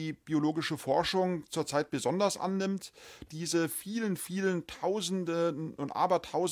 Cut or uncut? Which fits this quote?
cut